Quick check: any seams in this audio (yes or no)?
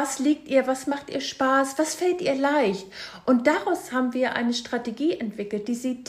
no